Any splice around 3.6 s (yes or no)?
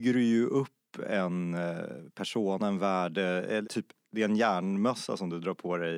yes